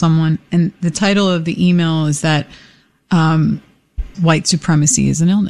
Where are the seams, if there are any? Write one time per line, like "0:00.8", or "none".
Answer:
0:04.1